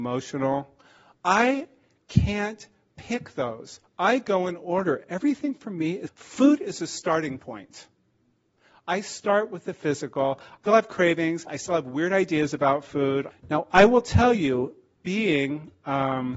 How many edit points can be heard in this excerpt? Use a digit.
3